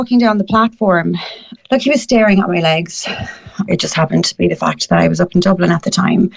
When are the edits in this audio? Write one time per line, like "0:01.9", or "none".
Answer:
0:01.6
0:03.7